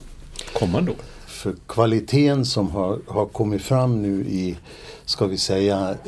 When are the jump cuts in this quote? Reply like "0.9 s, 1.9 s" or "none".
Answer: 1.3 s